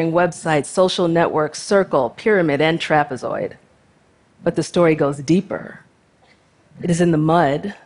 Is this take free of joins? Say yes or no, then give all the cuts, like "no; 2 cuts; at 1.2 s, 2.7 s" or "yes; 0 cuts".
yes; 0 cuts